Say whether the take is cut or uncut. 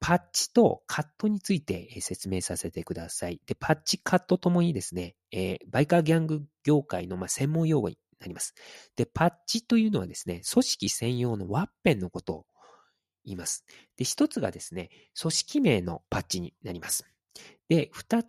cut